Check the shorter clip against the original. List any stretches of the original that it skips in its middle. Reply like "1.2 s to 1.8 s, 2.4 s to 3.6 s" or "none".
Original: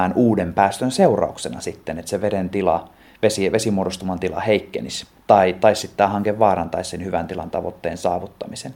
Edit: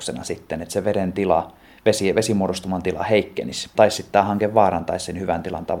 5.1 s to 5.6 s